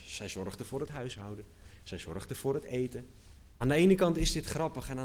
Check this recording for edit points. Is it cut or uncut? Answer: cut